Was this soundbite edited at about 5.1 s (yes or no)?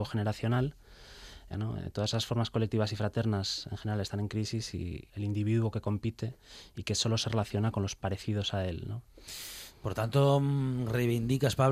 yes